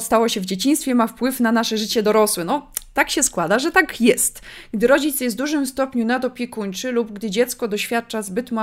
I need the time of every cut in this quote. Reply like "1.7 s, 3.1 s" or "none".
none